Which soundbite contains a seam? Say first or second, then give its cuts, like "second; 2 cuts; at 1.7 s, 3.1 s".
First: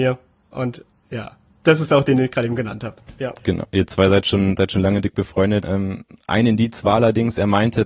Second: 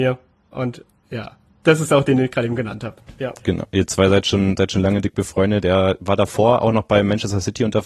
first; 1 cut; at 5.6 s